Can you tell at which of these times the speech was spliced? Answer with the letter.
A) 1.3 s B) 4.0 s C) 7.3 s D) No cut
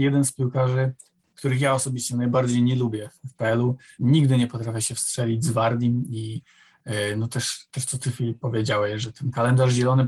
B